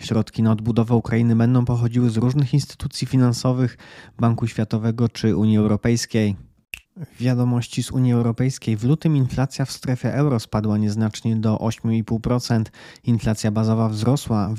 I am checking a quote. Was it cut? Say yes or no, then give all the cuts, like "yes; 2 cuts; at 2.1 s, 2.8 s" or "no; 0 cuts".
yes; 1 cut; at 6.8 s